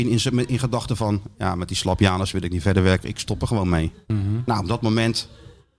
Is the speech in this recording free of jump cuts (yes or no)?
yes